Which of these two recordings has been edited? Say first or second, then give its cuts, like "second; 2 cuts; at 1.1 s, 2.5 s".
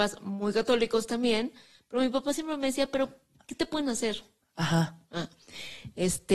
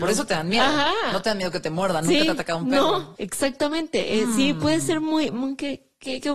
second; 1 cut; at 3.1 s